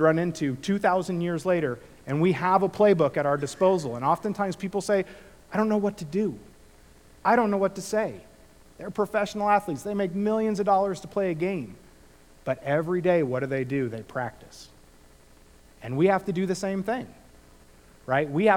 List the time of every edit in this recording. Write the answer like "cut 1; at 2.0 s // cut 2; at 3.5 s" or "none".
cut 1; at 8.8 s